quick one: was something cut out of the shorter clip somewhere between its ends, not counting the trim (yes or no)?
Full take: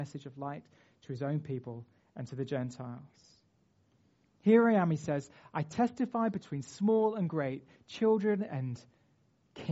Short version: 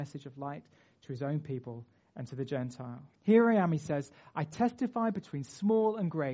yes